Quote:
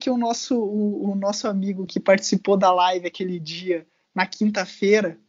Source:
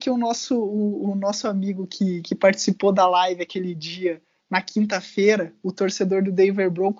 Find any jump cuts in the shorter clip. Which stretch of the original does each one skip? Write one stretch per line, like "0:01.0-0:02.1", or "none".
0:01.9-0:02.2